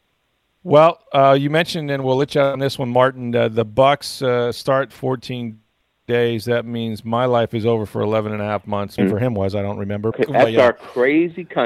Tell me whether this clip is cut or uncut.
cut